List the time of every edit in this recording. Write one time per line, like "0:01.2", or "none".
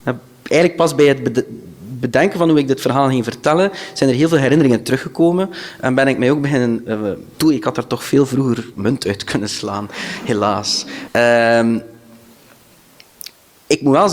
0:07.3
0:11.1